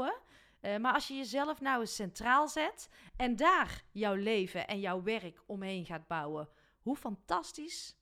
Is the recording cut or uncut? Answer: uncut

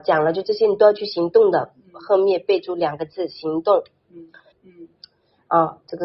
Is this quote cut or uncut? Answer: cut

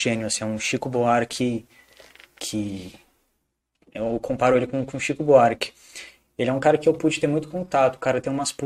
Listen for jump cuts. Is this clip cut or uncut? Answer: uncut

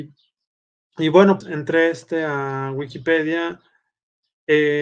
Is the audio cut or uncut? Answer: cut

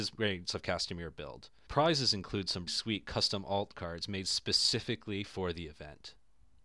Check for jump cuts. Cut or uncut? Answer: cut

